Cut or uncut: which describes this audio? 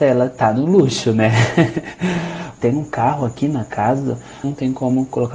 cut